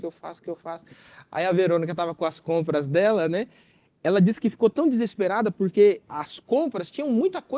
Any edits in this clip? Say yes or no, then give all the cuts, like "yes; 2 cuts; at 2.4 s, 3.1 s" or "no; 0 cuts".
no; 0 cuts